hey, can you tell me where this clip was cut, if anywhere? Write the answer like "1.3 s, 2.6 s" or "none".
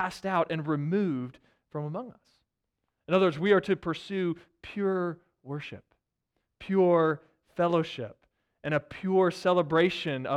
none